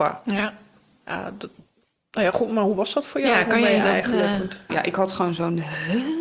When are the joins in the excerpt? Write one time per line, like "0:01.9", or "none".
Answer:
0:04.7

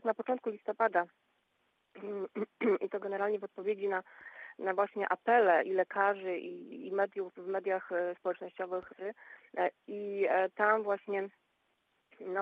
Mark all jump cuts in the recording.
0:08.9

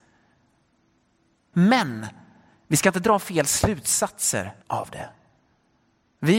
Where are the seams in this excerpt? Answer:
0:01.5
0:04.6

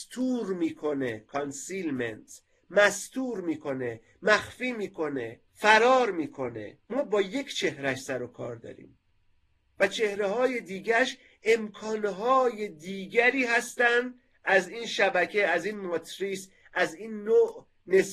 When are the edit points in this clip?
0:05.5
0:06.8

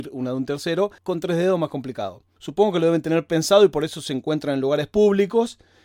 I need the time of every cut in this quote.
0:01.0
0:02.4

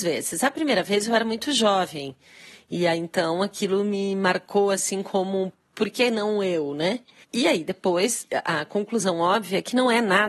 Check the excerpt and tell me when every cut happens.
0:07.2

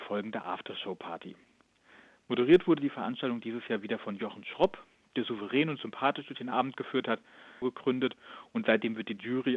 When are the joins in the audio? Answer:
0:07.6

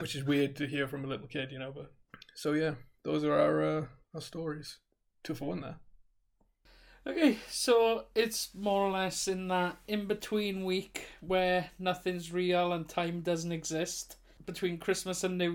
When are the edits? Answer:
none

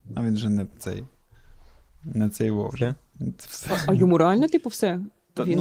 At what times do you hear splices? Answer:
none

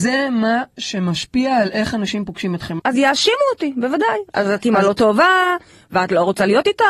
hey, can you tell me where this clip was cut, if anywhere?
0:02.8

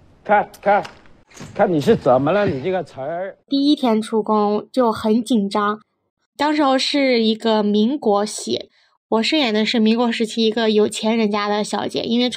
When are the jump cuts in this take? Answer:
0:03.4

